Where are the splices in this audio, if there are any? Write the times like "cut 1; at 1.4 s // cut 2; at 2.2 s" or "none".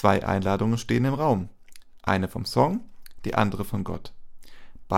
none